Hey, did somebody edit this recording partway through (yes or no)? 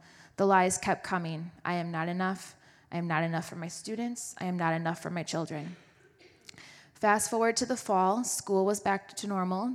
no